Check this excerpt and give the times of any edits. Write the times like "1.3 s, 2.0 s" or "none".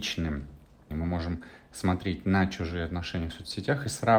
0.9 s

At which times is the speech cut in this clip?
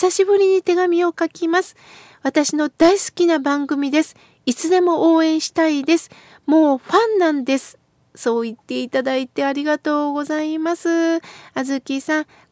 none

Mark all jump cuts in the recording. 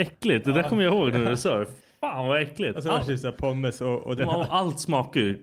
4.2 s

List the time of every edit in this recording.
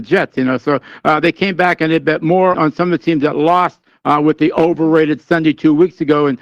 2.5 s

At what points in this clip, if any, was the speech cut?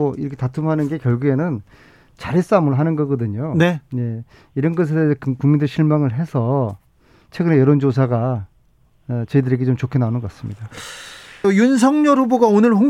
11.4 s

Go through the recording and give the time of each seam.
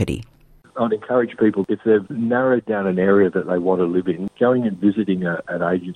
4.3 s

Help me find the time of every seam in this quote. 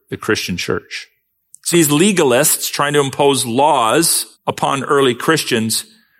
1.7 s, 4.3 s

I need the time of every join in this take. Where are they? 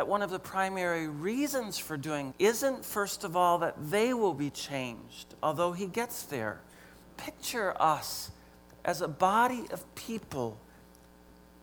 2.3 s, 7.0 s

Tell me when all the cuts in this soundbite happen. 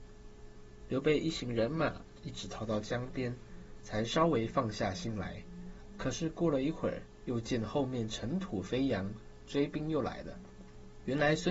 none

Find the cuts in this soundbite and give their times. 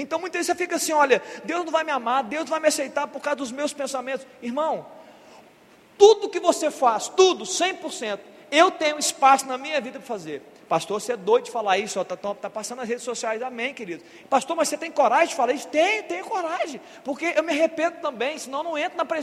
14.2 s

